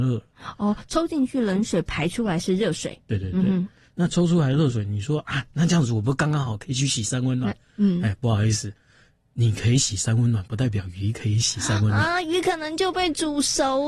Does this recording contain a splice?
no; 0 cuts

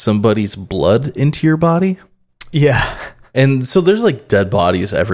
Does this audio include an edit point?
no; 0 cuts

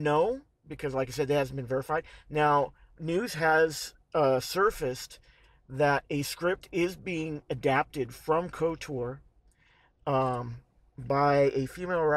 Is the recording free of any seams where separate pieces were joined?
no; 1 cut; at 3.0 s

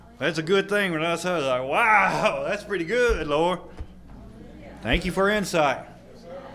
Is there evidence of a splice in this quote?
no; 0 cuts

